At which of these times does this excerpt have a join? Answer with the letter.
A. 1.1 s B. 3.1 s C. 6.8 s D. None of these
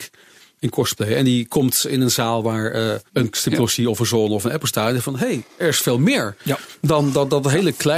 B